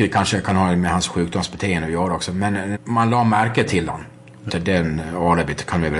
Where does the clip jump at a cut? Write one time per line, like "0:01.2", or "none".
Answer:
0:02.7
0:04.5